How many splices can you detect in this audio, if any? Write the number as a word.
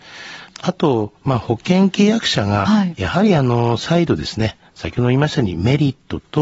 one